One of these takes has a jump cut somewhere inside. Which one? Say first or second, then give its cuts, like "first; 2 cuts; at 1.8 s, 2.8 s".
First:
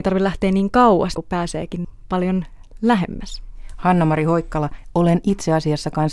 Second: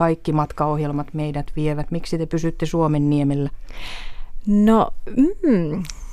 first; 1 cut; at 1.1 s